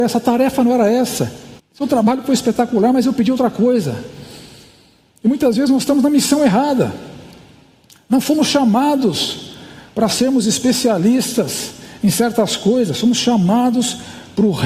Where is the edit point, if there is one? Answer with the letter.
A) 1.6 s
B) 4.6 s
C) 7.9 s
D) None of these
A